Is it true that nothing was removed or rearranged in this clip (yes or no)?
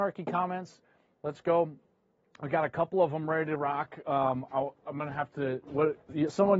yes